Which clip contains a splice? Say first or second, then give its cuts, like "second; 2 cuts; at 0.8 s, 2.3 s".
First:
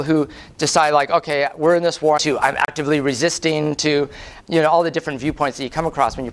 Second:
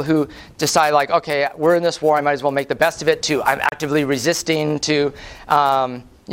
first; 2 cuts; at 2.2 s, 4.4 s